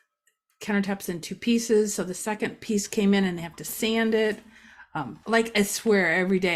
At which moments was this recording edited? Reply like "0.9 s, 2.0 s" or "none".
5.2 s